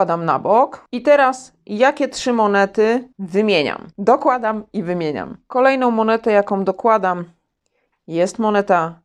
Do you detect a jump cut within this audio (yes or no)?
yes